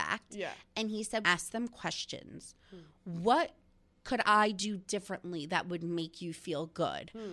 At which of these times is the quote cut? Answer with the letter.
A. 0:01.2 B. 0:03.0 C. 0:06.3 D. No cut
A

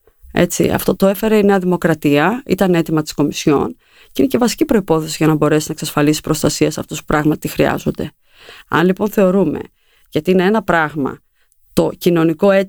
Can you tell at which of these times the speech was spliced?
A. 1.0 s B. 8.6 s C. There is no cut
A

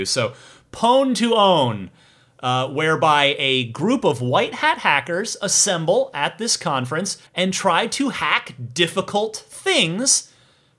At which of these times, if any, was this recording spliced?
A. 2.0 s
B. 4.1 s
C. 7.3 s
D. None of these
C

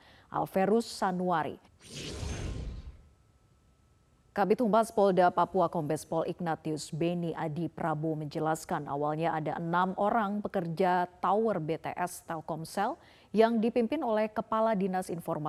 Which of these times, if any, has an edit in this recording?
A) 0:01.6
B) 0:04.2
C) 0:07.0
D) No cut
A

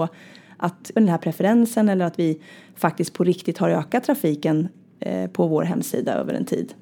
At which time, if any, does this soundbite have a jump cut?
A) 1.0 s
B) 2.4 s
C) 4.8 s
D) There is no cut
A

